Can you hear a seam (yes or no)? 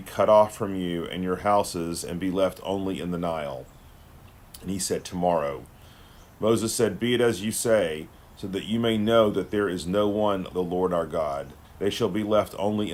yes